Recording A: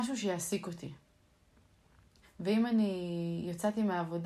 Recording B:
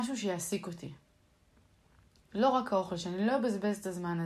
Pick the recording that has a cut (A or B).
A